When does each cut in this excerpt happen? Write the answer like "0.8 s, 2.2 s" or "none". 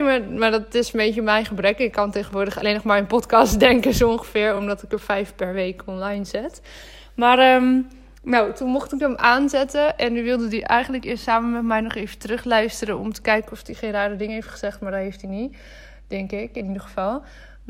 none